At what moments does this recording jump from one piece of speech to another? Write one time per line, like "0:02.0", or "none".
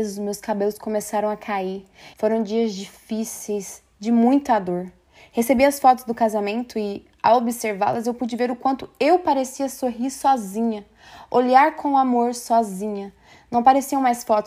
0:02.1